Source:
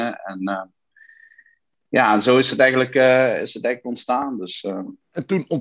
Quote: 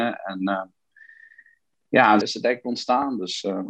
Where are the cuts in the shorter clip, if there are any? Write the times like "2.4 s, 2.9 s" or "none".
2.2 s